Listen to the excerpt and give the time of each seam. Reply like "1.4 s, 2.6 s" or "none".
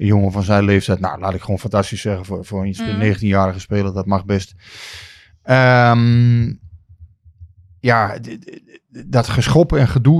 none